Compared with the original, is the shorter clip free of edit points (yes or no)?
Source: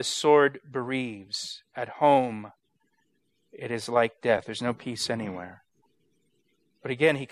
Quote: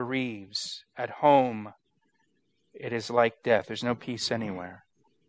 yes